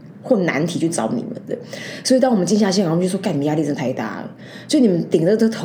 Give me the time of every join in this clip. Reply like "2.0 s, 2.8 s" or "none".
none

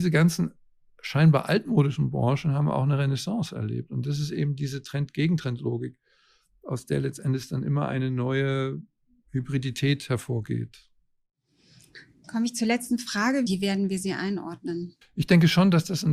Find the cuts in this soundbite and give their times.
13.5 s, 15.0 s

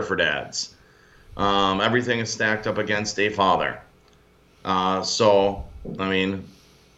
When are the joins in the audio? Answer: none

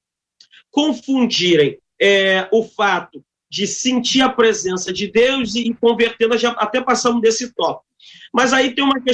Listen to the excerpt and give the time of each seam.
5.6 s

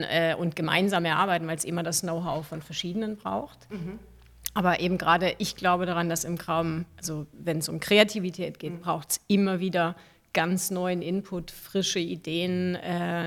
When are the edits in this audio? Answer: none

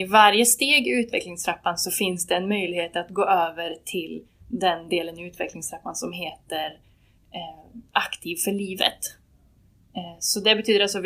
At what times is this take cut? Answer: none

